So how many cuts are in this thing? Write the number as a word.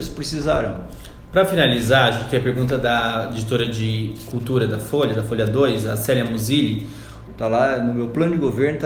one